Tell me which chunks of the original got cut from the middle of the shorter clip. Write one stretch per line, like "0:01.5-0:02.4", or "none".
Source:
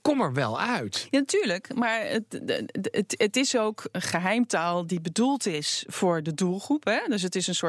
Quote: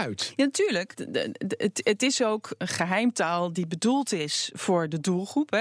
0:01.7-0:02.3